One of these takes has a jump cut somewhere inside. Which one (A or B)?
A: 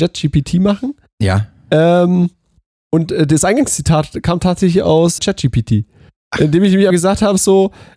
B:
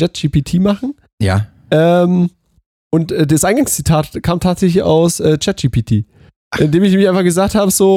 A